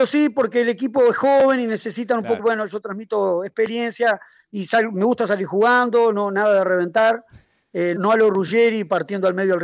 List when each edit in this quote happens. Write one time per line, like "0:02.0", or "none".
0:02.4
0:08.0